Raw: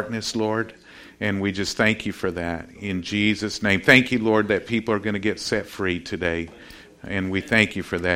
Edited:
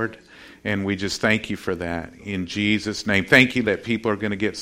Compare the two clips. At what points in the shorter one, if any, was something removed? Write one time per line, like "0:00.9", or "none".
0:03.6